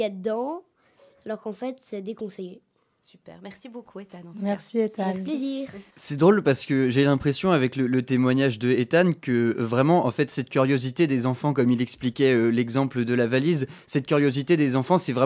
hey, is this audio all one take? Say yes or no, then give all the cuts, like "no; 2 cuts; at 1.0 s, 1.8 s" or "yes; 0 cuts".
no; 1 cut; at 5.9 s